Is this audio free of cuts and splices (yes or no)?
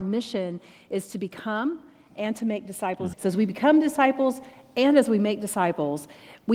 no